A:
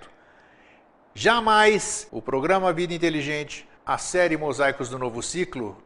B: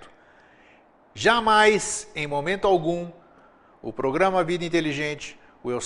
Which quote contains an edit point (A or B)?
A